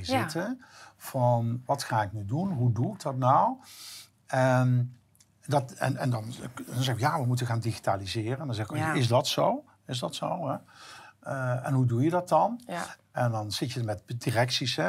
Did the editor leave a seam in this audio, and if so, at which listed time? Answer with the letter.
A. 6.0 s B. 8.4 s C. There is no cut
C